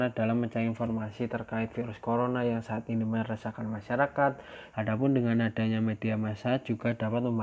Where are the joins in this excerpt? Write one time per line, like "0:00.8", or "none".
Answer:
0:04.7